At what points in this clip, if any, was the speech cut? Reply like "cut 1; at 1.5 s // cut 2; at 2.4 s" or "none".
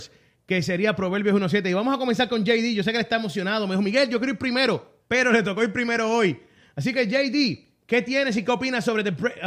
cut 1; at 5.0 s